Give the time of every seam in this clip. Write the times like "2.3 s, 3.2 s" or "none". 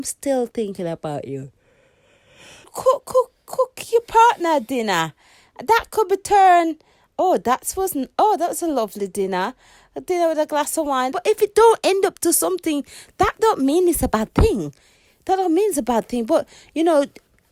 2.6 s, 11.1 s